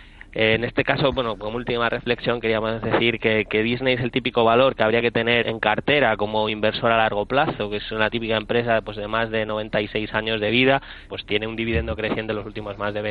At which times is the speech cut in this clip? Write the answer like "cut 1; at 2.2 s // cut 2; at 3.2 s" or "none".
cut 1; at 5.4 s // cut 2; at 11.1 s

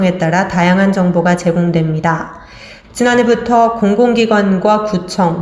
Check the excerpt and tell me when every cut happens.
cut 1; at 2.8 s

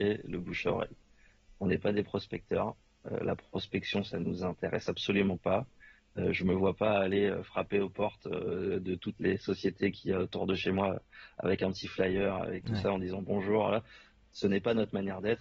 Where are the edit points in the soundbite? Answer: none

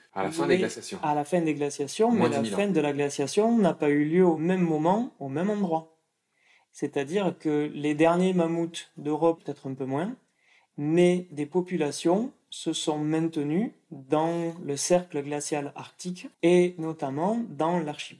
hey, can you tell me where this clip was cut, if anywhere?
cut 1; at 9.4 s // cut 2; at 16.3 s

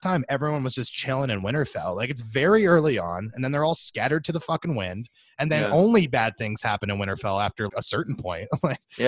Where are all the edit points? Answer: cut 1; at 7.7 s

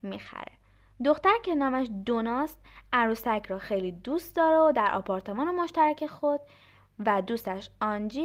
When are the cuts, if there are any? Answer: none

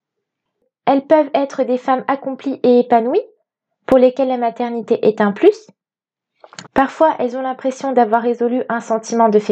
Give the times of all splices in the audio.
cut 1; at 6.7 s

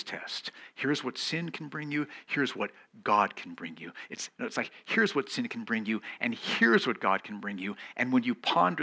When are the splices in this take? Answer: none

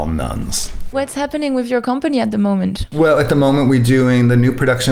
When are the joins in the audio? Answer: none

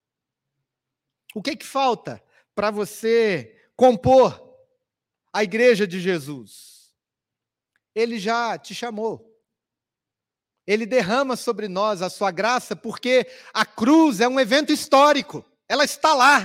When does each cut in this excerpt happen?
none

